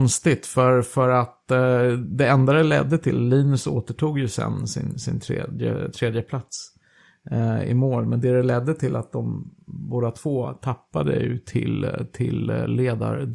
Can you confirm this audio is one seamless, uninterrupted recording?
yes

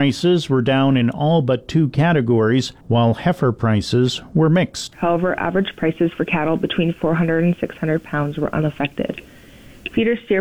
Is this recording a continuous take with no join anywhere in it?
no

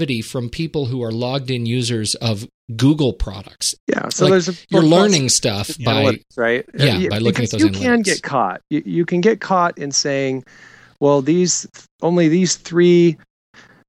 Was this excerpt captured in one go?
no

